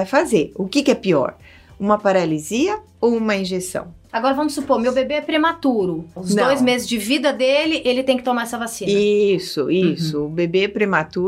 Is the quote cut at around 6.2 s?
yes; 2 cuts; at 4.1 s, 6.2 s

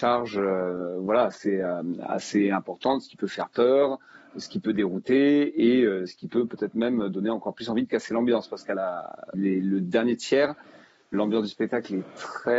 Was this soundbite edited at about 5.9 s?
no; 2 cuts; at 9.3 s, 11.1 s

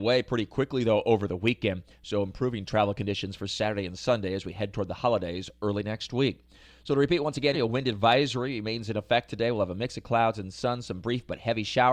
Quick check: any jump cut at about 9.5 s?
no; 1 cut; at 7.5 s

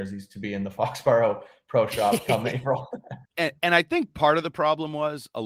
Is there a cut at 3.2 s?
yes; 1 cut; at 3.2 s

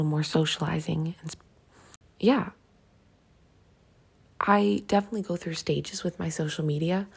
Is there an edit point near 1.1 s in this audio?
no; 0 cuts

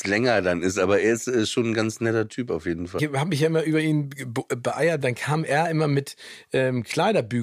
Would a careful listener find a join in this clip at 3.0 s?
yes; 2 cuts; at 3.0 s, 5.0 s

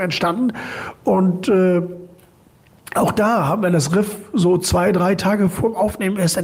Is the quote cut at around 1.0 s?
no; 0 cuts

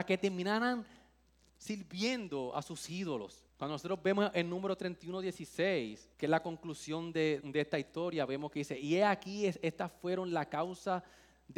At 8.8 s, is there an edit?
no; 3 cuts; at 3.5 s, 6.1 s, 7.4 s

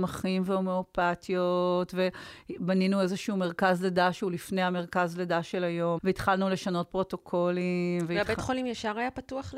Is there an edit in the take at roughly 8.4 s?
no; 1 cut; at 6.0 s

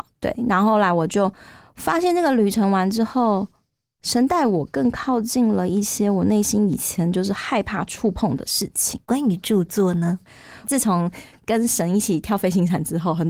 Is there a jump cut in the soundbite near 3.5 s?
no; 2 cuts; at 9.0 s, 10.6 s

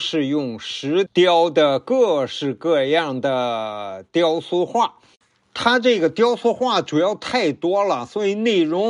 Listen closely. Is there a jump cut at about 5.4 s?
no; 1 cut; at 1.1 s

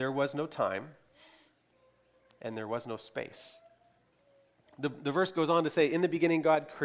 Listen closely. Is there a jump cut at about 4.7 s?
yes; 1 cut; at 4.7 s

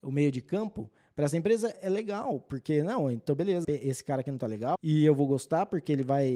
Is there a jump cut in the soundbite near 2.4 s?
no; 2 cuts; at 3.6 s, 4.7 s

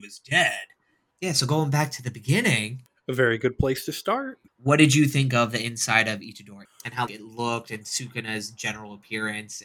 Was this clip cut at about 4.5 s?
yes; 3 cuts; at 1.1 s, 4.5 s, 7.1 s

